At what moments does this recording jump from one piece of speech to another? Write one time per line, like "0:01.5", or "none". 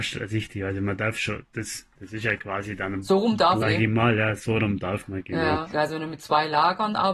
0:03.6
0:05.7